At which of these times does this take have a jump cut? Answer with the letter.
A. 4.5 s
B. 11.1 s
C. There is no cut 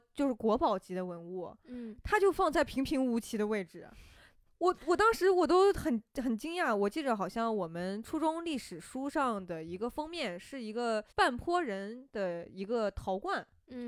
B